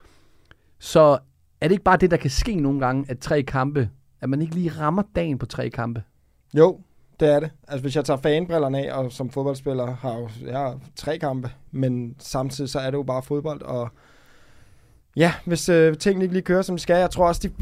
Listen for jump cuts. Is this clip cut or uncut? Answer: cut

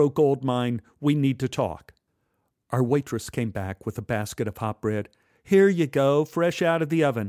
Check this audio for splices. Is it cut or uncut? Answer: uncut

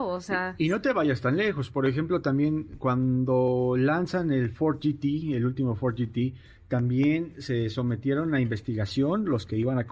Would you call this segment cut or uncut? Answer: uncut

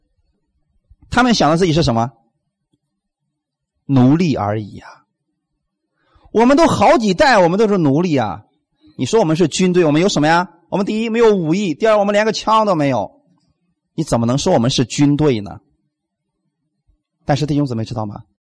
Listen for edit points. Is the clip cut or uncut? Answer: uncut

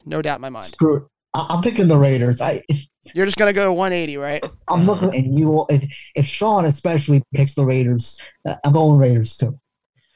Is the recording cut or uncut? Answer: cut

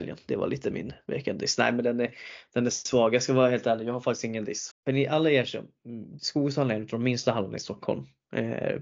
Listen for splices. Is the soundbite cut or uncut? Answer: cut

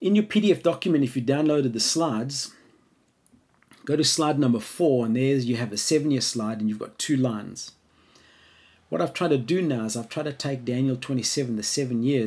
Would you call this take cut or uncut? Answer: uncut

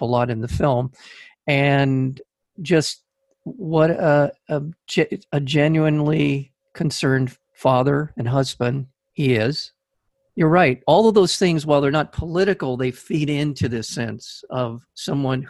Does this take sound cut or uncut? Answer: uncut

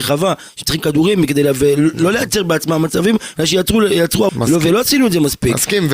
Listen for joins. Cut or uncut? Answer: cut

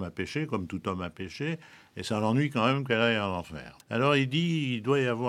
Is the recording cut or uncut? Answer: cut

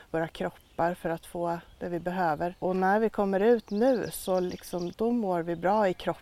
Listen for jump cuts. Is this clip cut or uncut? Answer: uncut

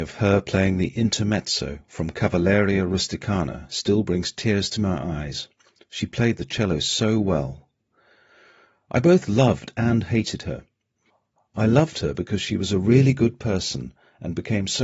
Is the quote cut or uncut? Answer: uncut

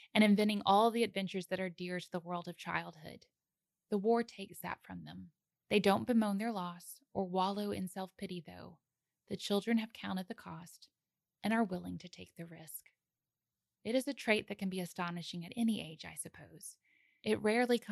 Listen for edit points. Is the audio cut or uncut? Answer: cut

